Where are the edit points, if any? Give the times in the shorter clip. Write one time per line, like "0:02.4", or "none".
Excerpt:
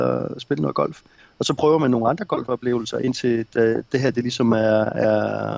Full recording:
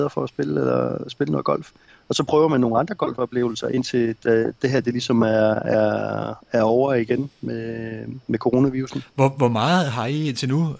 none